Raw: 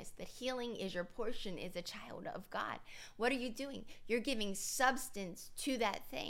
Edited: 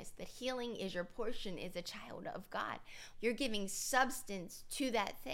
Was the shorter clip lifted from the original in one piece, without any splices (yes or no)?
no